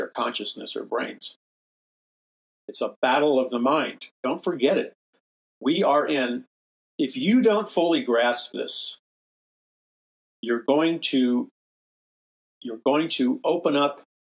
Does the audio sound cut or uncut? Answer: cut